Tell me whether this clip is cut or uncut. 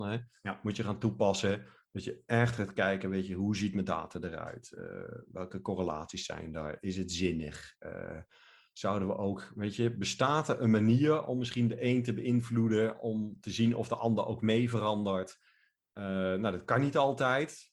uncut